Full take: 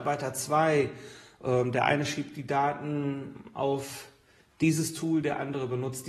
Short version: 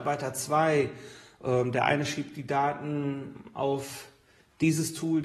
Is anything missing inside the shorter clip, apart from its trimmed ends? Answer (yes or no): no